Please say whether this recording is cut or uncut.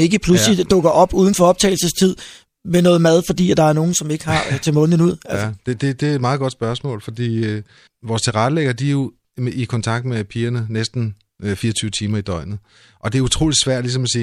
cut